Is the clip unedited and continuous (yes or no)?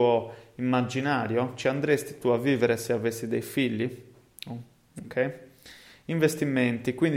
yes